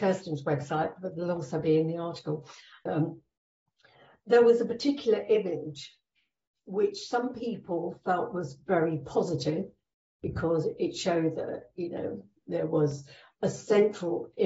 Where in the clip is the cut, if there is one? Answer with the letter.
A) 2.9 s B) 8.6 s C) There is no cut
A